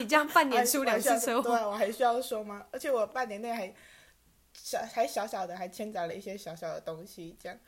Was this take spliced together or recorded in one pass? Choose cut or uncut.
uncut